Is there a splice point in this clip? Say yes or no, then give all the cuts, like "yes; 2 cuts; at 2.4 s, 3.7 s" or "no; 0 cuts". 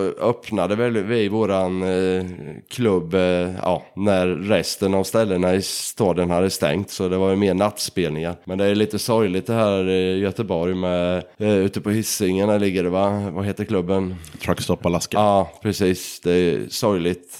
no; 0 cuts